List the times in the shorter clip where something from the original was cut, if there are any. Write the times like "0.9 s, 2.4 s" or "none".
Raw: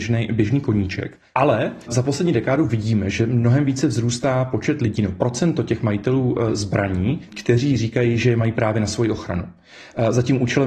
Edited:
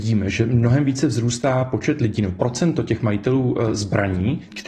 none